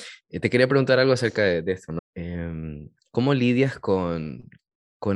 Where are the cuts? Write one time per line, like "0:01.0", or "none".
0:02.0